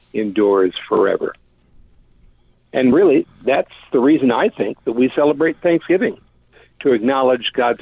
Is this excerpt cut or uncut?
uncut